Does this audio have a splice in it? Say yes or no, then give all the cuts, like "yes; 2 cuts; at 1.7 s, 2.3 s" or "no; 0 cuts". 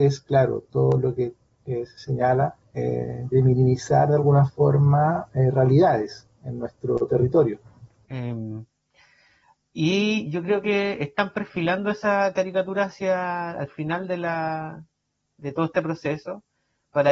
yes; 1 cut; at 8.0 s